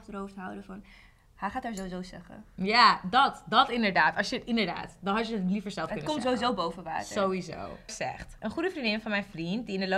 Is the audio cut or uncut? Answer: cut